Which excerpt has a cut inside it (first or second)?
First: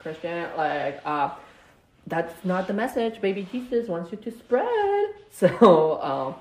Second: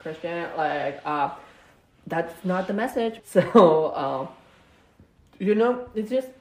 second